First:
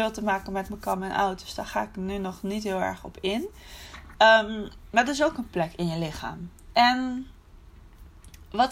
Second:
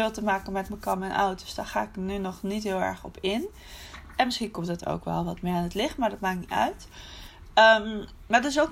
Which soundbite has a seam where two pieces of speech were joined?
first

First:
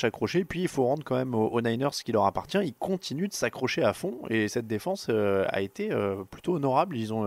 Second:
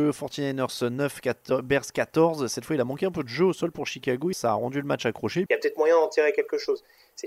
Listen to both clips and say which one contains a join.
second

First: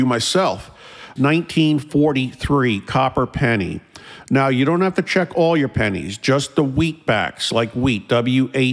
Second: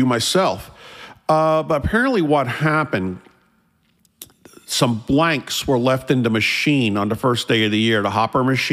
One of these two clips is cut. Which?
first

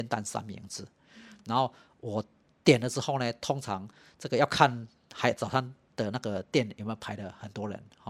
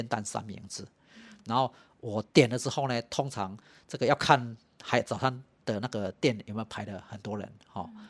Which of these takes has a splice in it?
second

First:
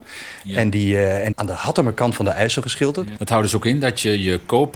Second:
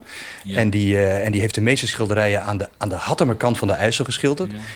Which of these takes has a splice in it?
first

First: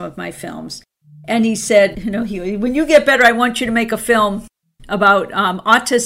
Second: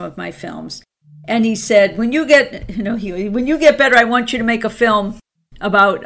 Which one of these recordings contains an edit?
first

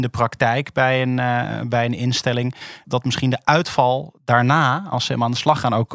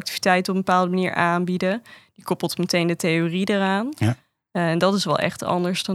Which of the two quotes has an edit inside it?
first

